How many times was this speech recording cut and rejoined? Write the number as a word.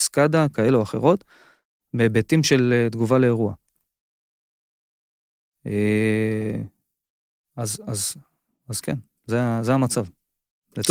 zero